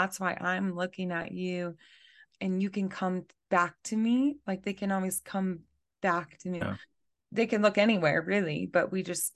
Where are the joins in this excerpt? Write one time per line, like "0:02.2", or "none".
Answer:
0:06.6